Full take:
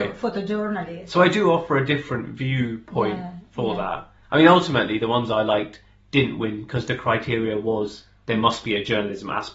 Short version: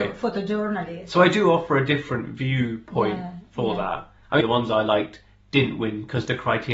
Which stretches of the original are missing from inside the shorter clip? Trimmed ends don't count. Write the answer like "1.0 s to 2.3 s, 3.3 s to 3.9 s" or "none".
4.4 s to 5.0 s

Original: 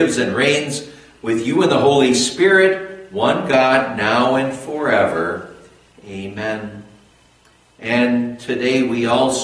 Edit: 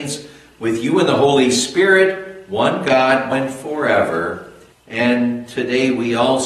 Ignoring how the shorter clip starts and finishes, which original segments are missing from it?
3.9 s to 4.3 s, 5.8 s to 7.6 s

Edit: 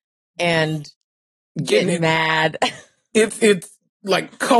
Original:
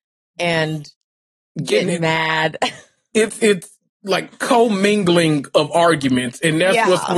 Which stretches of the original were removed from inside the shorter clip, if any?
none

